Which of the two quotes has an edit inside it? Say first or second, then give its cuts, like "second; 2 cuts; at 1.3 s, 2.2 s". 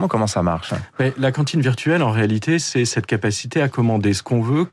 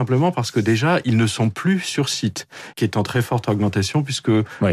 second; 1 cut; at 2.7 s